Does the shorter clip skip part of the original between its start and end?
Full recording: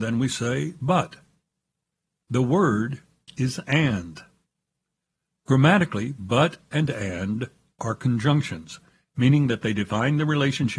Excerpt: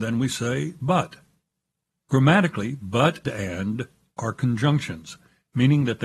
yes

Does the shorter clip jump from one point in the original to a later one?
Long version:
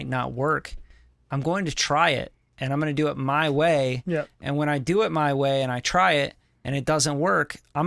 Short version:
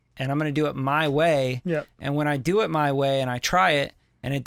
no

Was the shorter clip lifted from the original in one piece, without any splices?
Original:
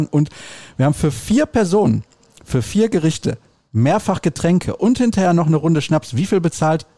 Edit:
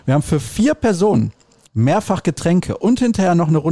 no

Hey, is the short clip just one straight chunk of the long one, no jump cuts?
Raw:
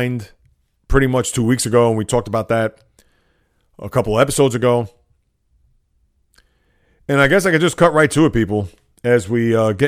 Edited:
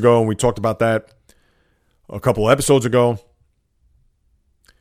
yes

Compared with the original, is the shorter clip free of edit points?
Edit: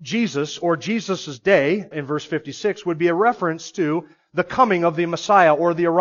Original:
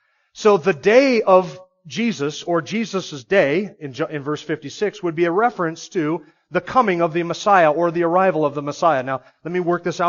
no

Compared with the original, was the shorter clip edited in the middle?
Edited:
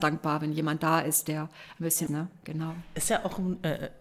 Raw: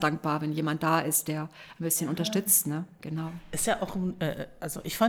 yes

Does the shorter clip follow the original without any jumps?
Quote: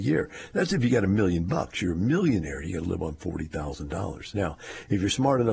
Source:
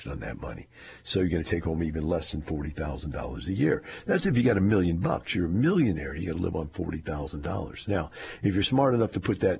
yes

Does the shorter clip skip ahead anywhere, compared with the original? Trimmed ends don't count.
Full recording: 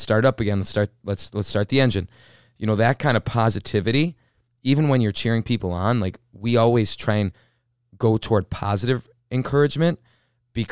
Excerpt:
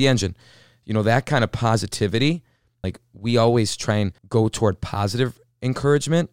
yes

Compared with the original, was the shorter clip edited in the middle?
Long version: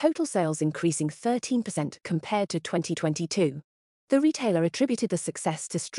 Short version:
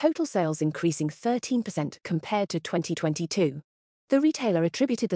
no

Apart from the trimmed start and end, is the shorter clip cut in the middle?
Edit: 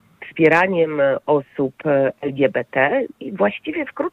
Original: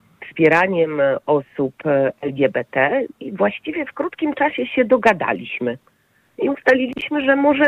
no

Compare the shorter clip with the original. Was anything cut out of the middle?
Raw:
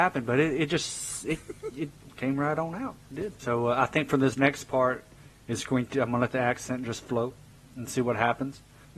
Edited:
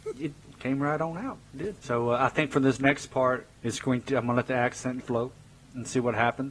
yes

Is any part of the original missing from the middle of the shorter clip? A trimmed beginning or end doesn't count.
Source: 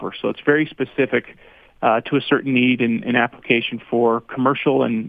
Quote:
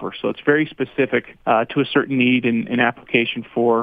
yes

